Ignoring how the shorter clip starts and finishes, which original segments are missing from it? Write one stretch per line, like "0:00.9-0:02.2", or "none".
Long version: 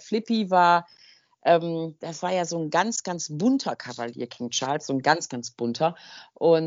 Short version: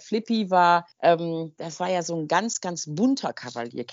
0:00.9-0:01.3